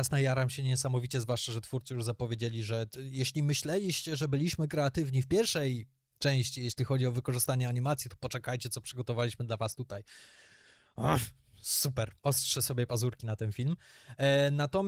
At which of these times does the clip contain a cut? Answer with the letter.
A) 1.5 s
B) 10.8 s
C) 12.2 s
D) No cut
C